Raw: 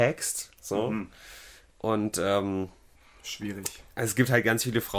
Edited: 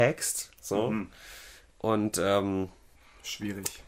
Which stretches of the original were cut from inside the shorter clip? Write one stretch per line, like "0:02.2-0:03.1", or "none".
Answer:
none